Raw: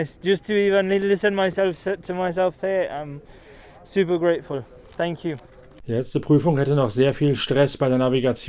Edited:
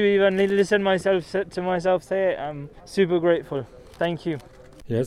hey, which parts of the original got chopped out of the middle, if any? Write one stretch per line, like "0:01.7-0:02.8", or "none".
0:03.3-0:03.8